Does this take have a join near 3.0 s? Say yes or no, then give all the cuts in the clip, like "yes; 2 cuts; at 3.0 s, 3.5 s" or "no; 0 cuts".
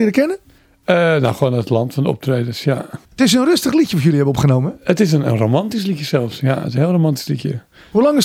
yes; 1 cut; at 3.0 s